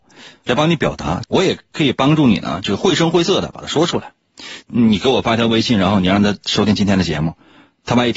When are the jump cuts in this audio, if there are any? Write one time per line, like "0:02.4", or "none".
0:01.2
0:04.6